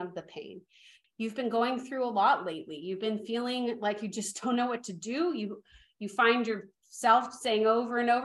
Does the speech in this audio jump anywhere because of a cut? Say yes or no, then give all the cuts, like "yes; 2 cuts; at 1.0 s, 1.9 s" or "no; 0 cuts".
yes; 1 cut; at 1.0 s